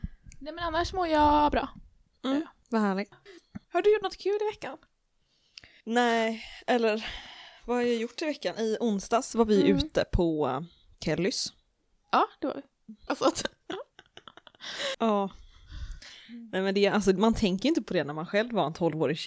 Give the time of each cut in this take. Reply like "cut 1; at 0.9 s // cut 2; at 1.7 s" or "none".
cut 1; at 13.1 s // cut 2; at 14.9 s